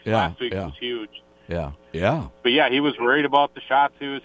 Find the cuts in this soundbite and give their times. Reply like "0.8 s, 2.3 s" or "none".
1.8 s